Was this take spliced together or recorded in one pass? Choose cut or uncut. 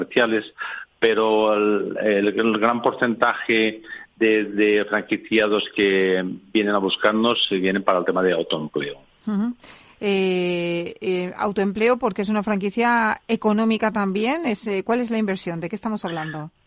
uncut